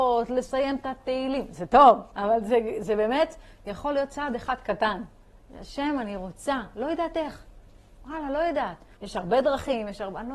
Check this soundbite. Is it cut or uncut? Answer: cut